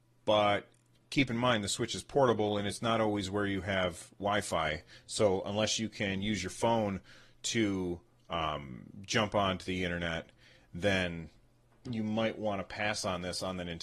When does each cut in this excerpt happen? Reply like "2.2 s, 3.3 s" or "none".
none